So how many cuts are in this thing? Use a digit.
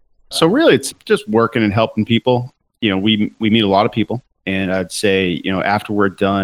0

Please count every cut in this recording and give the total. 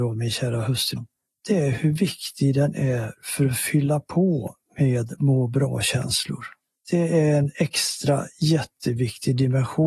1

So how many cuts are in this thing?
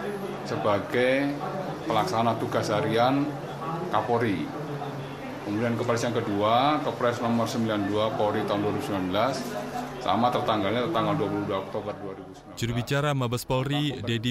1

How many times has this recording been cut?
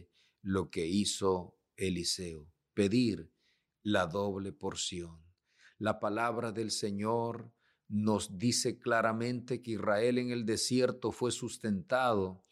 0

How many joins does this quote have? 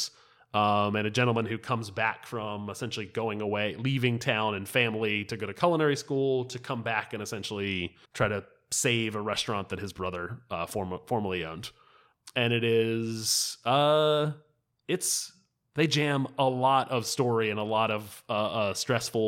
1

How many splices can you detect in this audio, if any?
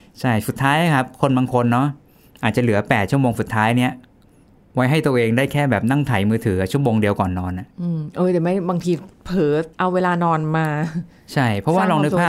2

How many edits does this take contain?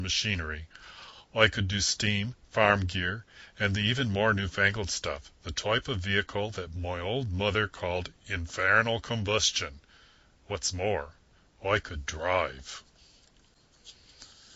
0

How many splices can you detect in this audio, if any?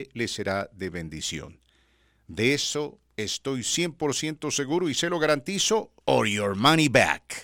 1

